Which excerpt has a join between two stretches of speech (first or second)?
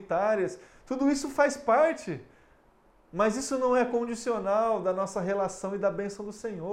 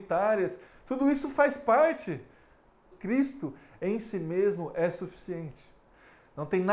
second